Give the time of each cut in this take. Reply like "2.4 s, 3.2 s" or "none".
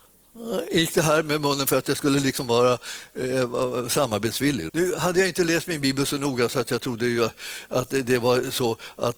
4.7 s